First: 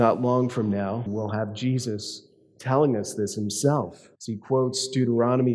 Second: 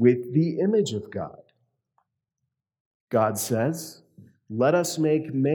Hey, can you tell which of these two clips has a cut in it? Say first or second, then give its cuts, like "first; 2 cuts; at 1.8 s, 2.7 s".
first; 2 cuts; at 1.1 s, 4.1 s